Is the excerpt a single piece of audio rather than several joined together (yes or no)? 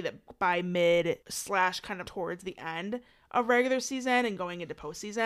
no